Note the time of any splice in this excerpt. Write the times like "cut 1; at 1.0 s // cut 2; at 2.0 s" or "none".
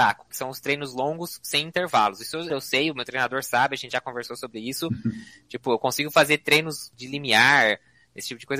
cut 1; at 2.5 s